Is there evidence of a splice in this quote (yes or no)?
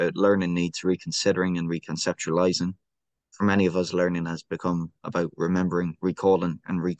no